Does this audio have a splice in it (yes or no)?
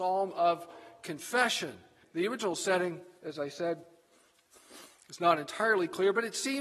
yes